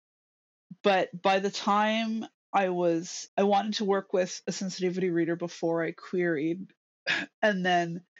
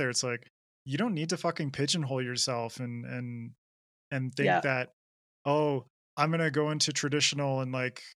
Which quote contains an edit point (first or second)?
first